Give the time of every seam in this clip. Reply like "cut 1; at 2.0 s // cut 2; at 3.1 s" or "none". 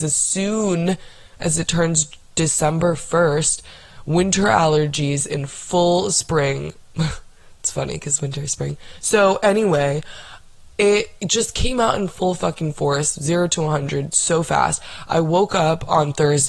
none